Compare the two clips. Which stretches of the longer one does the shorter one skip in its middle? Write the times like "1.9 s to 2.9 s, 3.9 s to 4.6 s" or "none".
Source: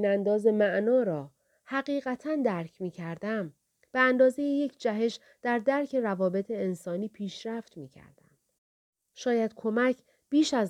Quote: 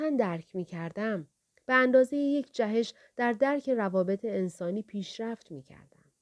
none